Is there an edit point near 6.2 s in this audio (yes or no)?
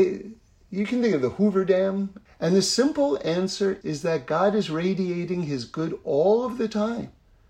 no